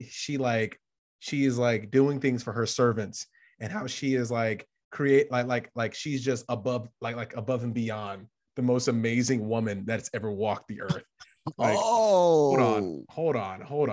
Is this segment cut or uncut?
uncut